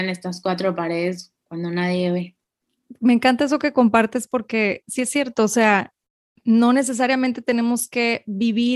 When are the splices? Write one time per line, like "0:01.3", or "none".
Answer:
none